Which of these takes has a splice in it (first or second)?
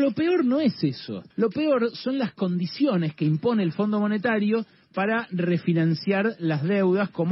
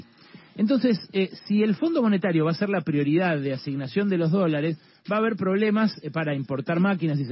first